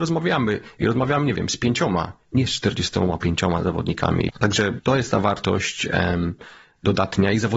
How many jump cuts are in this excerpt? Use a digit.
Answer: 1